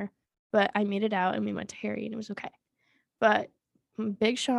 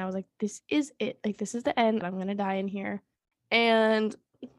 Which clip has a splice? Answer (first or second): second